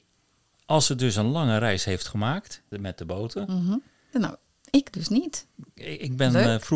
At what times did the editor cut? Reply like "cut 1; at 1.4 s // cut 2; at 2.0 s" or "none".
cut 1; at 2.7 s // cut 2; at 4.1 s